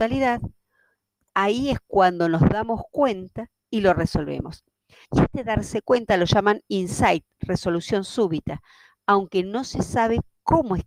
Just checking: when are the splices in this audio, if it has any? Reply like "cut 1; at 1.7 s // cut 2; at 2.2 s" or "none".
cut 1; at 5.0 s